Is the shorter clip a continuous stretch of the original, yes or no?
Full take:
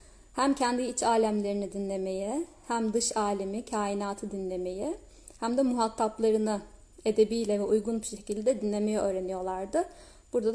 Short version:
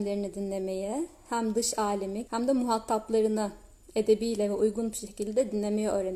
no